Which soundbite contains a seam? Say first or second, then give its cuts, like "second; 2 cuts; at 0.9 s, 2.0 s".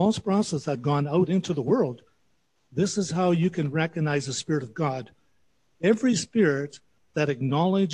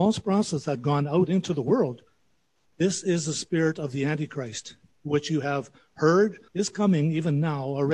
second; 2 cuts; at 2.6 s, 6.5 s